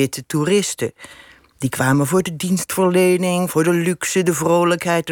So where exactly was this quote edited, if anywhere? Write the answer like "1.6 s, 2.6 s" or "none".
none